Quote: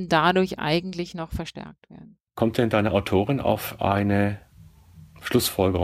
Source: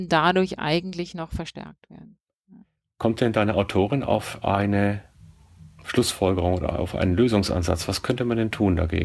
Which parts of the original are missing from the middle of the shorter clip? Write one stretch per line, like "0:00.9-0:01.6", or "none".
0:02.3-0:02.9